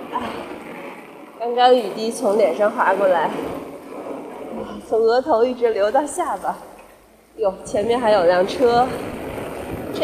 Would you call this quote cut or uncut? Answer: uncut